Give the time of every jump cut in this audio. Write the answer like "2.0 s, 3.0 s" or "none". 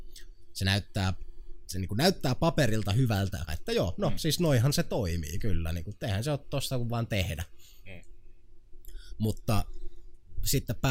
3.5 s